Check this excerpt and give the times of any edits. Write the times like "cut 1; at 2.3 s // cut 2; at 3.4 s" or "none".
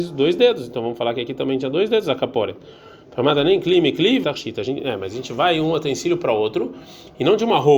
cut 1; at 4.2 s

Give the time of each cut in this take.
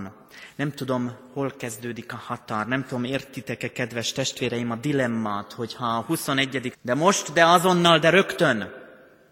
cut 1; at 6.7 s

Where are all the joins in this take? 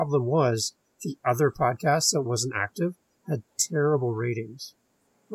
none

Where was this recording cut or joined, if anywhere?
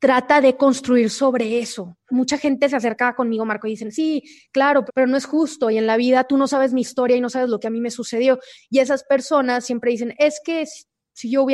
cut 1; at 2.1 s // cut 2; at 4.9 s // cut 3; at 8.6 s

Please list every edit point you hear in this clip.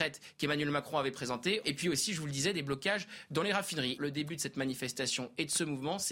cut 1; at 1.6 s // cut 2; at 4.0 s

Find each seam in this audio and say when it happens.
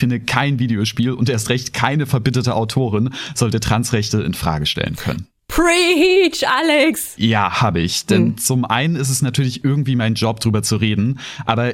cut 1; at 7.2 s

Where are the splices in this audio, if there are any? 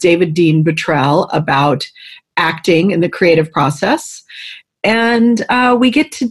none

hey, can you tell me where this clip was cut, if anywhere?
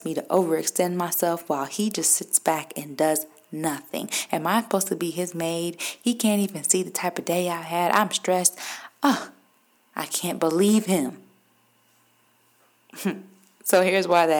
none

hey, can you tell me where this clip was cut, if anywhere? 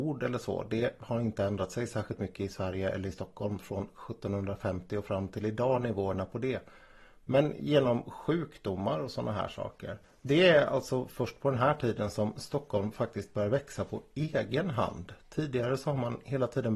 none

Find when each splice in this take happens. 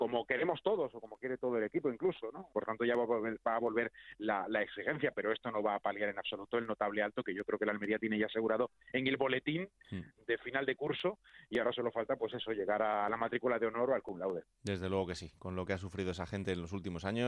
cut 1; at 2.5 s

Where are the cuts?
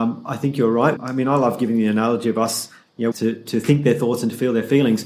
cut 1; at 1.0 s // cut 2; at 3.1 s

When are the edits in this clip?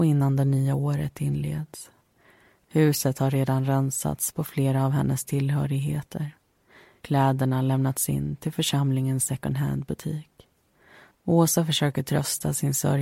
cut 1; at 11.1 s

